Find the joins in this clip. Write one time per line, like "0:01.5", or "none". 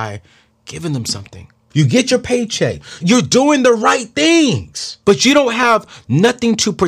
0:01.7
0:03.0
0:05.0